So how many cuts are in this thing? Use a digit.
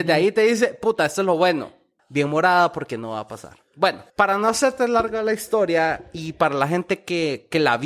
2